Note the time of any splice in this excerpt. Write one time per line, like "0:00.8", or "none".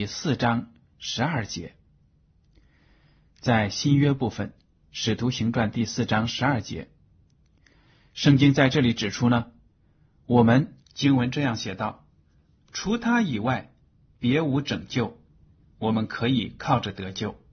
0:10.8
0:15.6